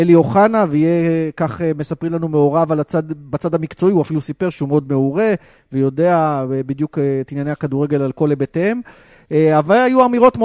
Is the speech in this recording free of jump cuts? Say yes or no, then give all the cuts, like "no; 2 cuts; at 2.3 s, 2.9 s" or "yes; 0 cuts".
yes; 0 cuts